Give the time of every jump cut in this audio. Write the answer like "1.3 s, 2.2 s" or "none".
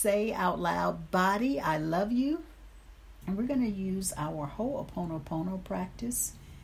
3.2 s